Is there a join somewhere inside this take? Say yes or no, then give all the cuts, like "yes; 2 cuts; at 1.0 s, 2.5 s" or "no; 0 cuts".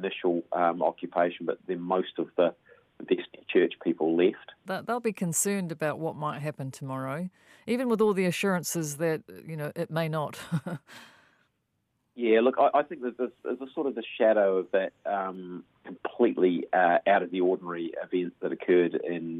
yes; 1 cut; at 4.6 s